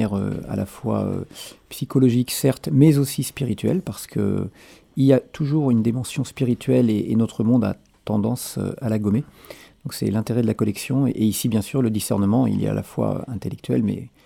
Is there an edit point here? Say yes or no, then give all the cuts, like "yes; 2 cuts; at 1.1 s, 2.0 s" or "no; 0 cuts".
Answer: no; 0 cuts